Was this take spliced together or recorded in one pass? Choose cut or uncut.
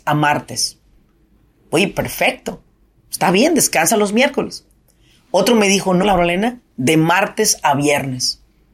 cut